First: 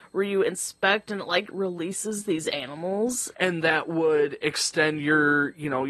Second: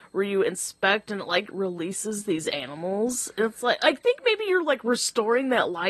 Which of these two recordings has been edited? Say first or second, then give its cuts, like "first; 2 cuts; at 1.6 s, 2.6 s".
first; 1 cut; at 3.3 s